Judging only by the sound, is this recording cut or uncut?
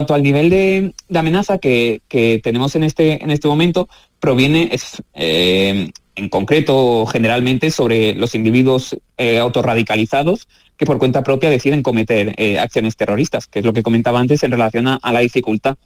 uncut